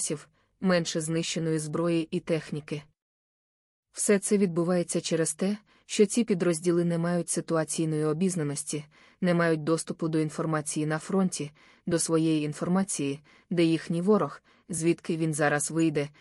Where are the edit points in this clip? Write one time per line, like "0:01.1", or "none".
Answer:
none